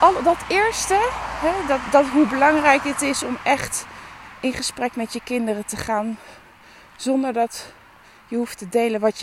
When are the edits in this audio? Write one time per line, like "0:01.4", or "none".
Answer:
none